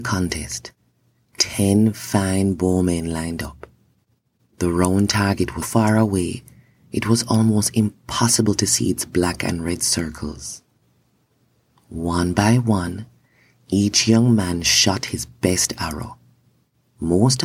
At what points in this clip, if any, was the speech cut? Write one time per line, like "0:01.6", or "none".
0:05.6